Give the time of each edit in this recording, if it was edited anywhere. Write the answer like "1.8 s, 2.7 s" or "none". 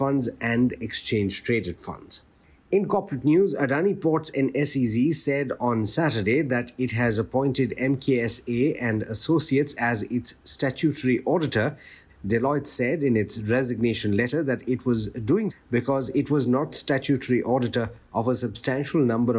12.1 s, 15.5 s

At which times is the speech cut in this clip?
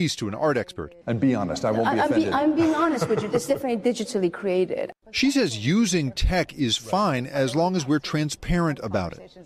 1.0 s

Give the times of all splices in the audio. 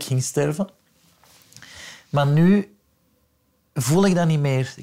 none

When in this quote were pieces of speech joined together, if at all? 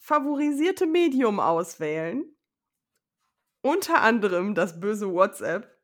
none

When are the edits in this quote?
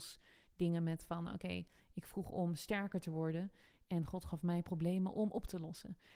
none

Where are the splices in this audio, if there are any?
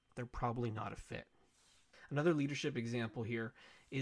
none

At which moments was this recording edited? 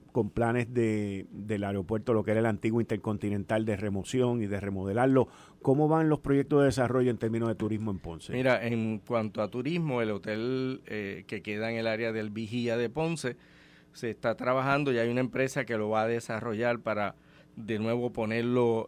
none

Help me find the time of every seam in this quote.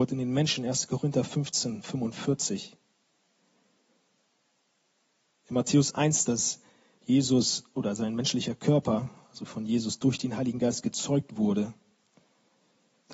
6.2 s

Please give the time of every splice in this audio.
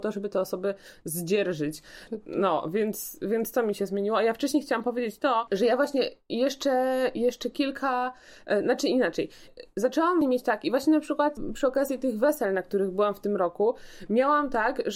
none

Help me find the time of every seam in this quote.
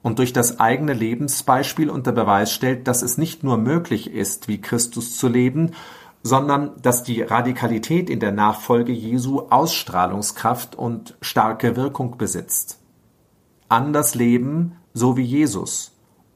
none

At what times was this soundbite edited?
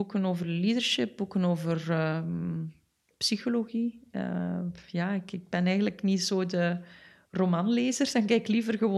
none

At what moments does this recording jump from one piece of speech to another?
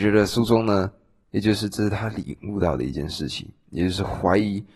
1.2 s

